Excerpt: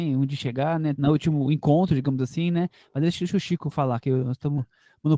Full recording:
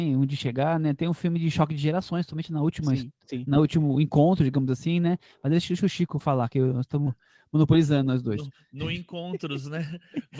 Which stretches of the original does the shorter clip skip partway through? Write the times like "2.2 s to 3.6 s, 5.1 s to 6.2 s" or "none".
1.0 s to 3.4 s